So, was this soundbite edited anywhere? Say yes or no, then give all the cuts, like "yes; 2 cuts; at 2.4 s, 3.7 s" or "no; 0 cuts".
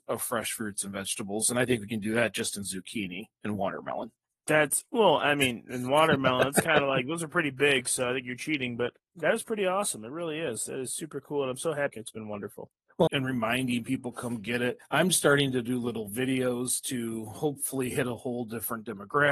yes; 2 cuts; at 11.9 s, 13.1 s